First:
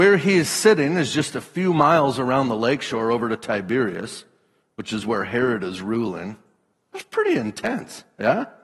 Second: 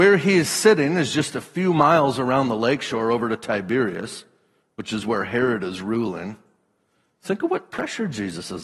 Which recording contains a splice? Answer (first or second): first